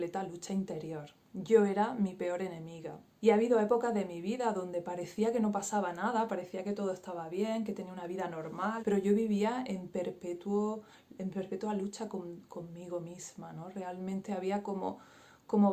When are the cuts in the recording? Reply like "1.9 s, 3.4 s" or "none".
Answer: 3.2 s, 8.8 s